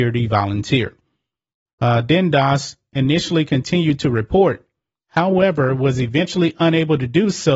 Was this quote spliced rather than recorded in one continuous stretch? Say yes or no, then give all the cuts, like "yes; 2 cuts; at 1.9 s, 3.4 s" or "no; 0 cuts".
yes; 1 cut; at 1.7 s